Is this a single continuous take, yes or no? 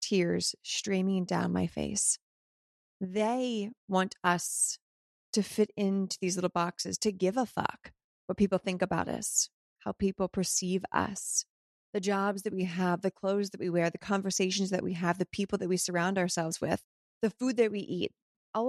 yes